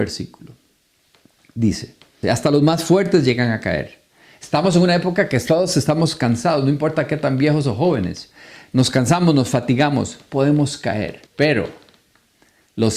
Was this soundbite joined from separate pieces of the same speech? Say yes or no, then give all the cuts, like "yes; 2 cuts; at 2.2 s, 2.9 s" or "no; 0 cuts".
yes; 2 cuts; at 2.2 s, 11.3 s